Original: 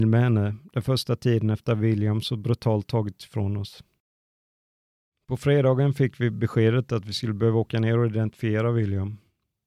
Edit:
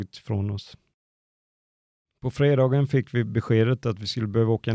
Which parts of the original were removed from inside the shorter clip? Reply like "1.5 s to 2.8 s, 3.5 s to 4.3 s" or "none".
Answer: none